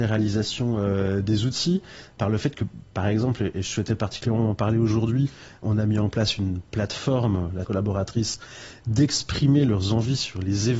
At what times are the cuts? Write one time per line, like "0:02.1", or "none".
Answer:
0:07.6